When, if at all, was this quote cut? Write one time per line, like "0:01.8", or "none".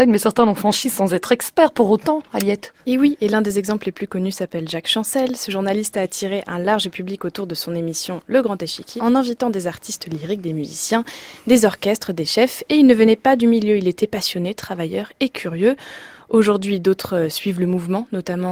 0:09.0